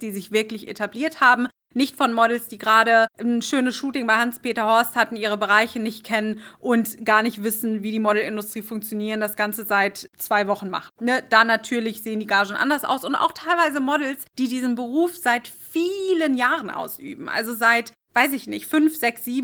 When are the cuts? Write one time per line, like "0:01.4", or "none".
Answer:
none